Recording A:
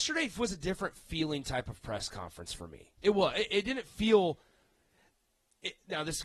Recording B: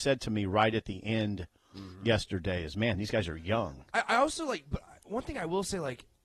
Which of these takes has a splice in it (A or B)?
A